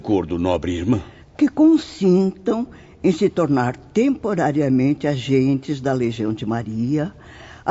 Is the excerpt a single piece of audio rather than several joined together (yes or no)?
no